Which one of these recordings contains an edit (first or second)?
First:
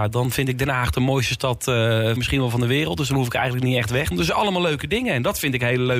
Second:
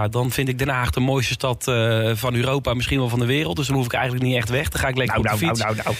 first